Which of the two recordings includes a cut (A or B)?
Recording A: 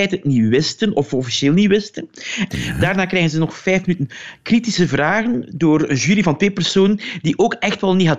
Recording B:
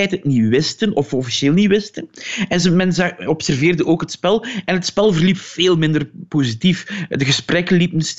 A